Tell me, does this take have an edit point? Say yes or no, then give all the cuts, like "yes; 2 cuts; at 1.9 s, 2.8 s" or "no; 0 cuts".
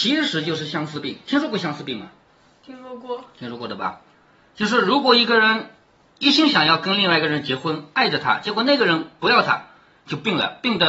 no; 0 cuts